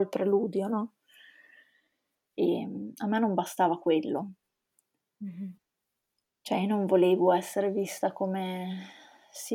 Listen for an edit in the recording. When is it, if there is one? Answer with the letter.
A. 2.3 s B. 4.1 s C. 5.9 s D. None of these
A